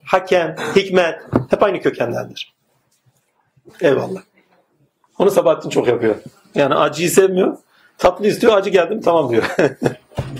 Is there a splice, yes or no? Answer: yes